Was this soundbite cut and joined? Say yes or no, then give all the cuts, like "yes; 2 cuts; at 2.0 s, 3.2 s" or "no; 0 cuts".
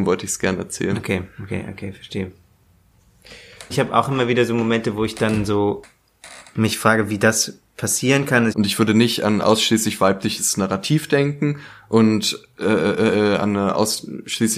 yes; 2 cuts; at 3.7 s, 8.5 s